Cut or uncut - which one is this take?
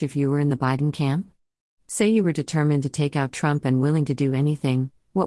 uncut